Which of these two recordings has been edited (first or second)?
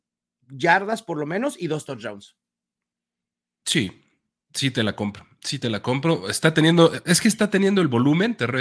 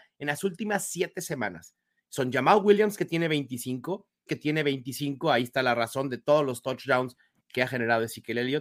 second